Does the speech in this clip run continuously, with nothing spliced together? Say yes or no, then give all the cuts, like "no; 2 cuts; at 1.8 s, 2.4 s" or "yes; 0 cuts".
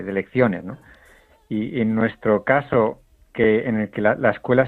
yes; 0 cuts